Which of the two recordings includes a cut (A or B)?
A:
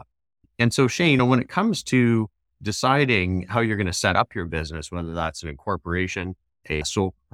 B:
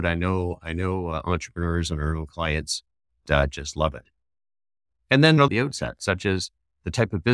B